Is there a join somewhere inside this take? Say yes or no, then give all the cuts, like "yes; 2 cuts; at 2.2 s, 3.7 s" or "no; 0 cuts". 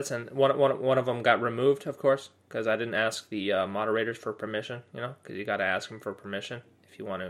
no; 0 cuts